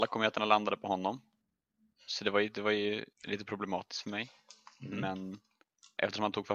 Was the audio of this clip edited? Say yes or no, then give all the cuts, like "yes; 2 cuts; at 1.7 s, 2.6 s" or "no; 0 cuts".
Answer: yes; 1 cut; at 3.1 s